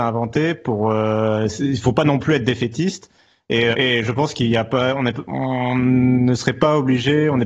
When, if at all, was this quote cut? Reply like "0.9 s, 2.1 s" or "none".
3.7 s